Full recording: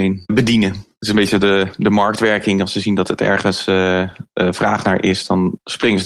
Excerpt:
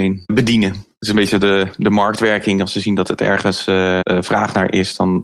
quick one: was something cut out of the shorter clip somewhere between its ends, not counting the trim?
yes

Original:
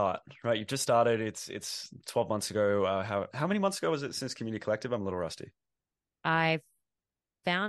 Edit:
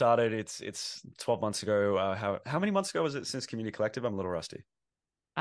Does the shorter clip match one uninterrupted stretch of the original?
yes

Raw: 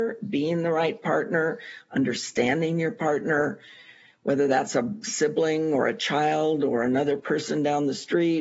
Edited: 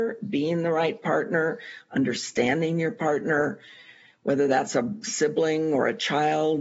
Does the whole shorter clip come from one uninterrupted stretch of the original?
yes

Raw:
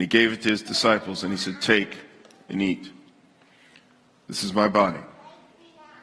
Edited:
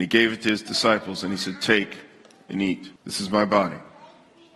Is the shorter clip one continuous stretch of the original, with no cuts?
no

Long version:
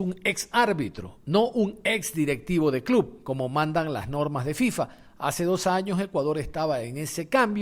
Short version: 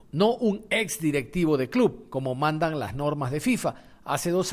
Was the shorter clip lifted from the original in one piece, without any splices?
yes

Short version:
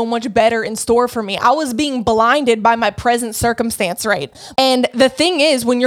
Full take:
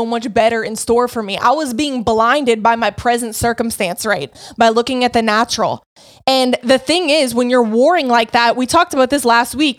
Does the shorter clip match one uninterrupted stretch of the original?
no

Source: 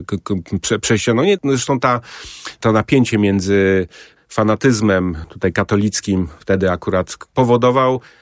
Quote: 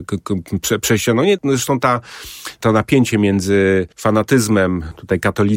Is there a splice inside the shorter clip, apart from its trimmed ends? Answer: yes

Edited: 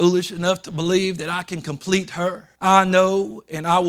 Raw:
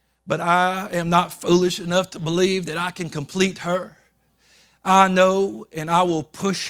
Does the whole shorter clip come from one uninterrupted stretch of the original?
no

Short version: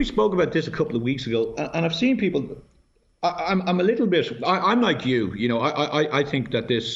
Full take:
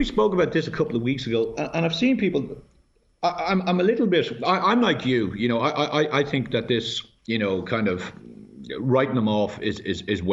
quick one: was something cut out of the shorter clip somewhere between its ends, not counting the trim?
no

